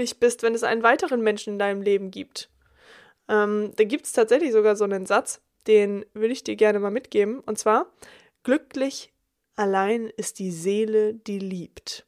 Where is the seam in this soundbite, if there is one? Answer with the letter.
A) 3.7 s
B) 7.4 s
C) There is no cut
C